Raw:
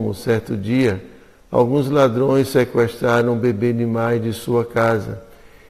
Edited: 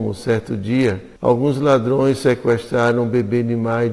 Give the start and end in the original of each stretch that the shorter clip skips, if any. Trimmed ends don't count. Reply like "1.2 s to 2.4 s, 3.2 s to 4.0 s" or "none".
1.2 s to 1.5 s